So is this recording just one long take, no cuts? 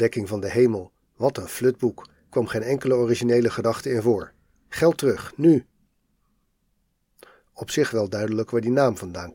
yes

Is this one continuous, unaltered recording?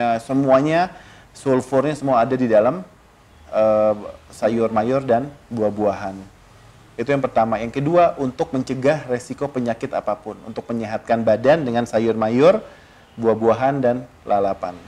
yes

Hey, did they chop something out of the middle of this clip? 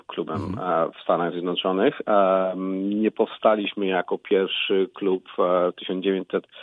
no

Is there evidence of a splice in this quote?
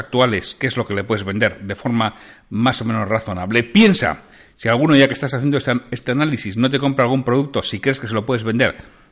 no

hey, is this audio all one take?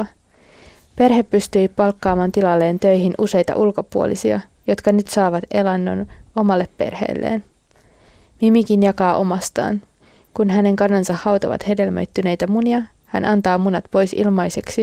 yes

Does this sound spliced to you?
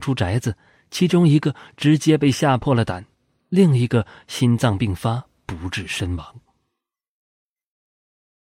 no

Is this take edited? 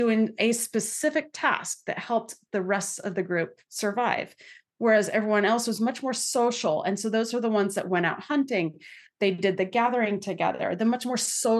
no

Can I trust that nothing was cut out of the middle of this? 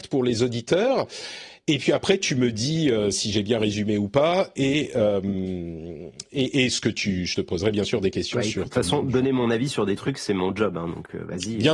yes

